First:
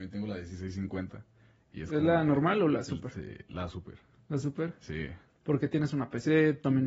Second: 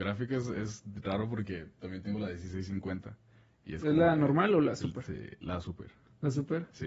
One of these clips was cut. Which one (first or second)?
first